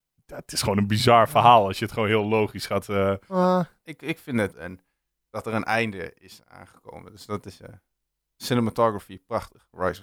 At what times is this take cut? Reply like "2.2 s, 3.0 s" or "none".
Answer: 4.5 s